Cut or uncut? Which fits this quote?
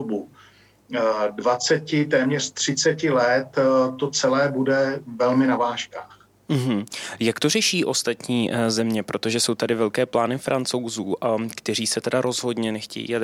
uncut